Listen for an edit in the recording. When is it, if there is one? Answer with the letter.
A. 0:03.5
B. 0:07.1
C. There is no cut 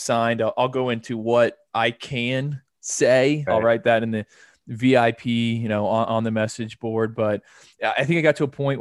A